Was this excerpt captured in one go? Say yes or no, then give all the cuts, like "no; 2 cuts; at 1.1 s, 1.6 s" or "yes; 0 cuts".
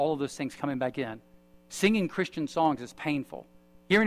yes; 0 cuts